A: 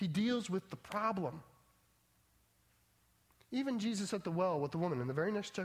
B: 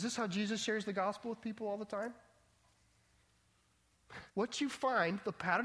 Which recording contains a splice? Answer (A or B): B